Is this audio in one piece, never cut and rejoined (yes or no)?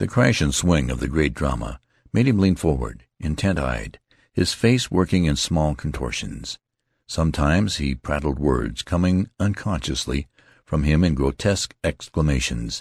yes